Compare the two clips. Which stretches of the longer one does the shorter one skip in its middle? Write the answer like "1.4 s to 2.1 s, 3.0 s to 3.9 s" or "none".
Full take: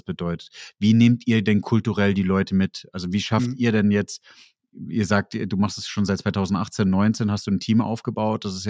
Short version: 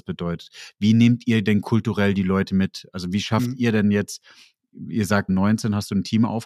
5.3 s to 6.8 s